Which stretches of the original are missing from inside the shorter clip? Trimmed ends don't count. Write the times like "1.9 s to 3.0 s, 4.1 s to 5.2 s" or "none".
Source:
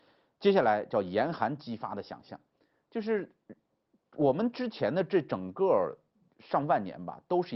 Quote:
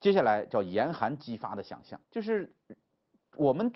2.4 s to 2.8 s